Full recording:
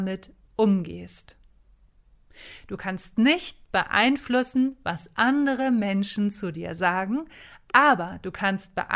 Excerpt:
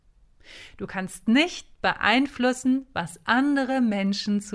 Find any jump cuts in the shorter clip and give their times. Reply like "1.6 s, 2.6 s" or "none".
none